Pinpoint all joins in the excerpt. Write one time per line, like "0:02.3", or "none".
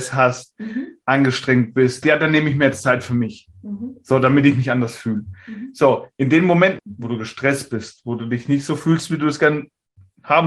0:02.0
0:06.8